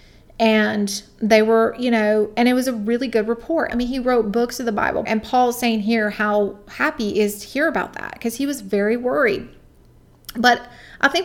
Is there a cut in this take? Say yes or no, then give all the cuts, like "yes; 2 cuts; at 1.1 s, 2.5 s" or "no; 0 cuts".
yes; 2 cuts; at 3.7 s, 5.1 s